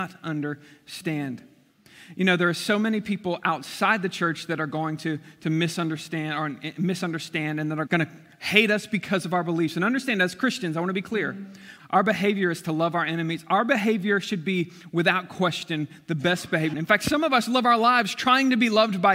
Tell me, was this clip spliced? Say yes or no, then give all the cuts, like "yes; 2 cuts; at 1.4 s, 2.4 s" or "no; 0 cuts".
yes; 3 cuts; at 7.9 s, 11.8 s, 16.7 s